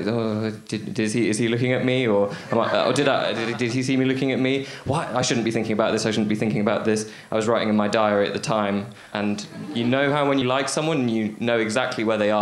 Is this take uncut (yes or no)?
no